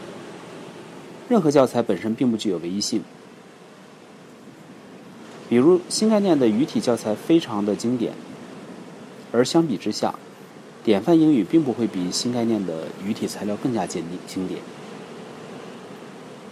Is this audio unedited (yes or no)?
yes